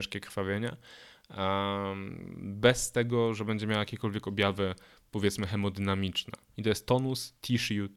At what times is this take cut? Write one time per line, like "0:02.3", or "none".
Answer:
0:06.5